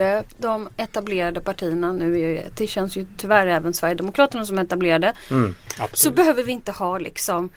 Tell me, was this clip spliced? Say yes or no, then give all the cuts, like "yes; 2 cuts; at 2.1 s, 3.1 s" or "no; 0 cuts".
yes; 2 cuts; at 2.5 s, 5.7 s